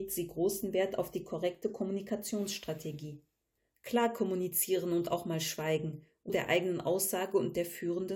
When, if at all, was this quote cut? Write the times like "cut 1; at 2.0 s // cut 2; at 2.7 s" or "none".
cut 1; at 6.3 s

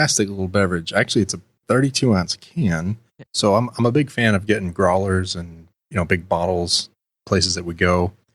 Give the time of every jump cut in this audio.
cut 1; at 3.3 s

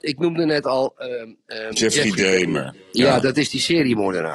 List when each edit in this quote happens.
none

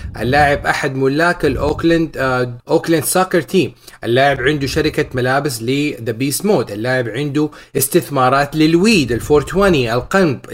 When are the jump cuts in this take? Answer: cut 1; at 2.6 s

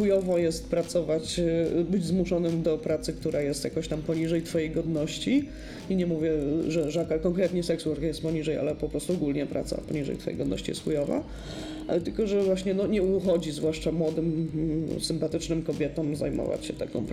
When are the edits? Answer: none

